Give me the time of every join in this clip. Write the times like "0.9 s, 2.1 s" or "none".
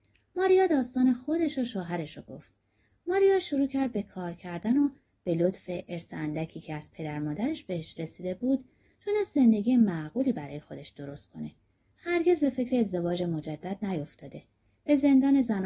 2.9 s